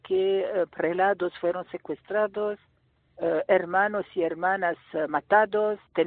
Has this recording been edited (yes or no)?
no